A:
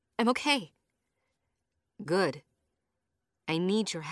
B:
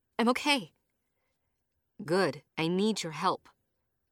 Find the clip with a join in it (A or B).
B